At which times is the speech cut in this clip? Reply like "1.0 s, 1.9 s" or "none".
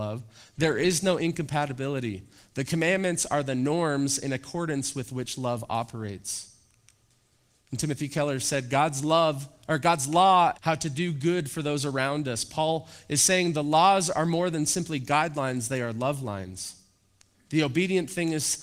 10.6 s